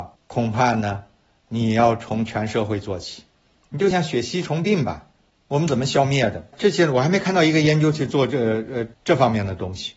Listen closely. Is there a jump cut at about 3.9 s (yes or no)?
yes